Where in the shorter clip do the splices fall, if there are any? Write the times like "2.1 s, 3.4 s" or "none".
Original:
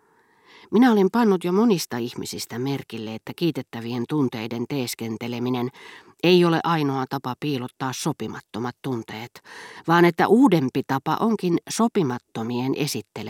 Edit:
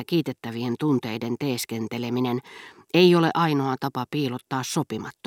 none